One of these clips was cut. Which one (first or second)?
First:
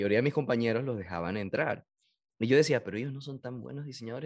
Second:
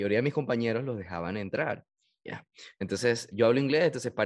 second